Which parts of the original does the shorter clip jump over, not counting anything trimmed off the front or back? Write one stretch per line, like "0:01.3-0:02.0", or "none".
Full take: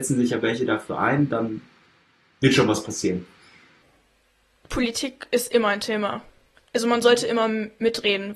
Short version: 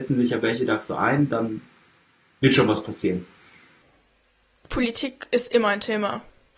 none